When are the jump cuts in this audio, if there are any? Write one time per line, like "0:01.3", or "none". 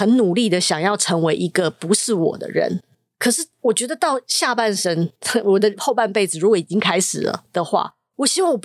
none